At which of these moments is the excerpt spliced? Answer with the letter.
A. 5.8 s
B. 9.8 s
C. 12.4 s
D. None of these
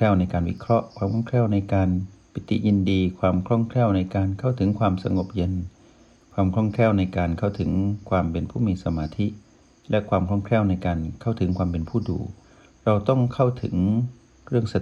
D